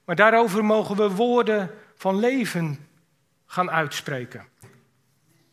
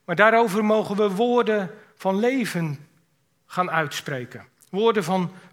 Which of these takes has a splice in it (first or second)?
first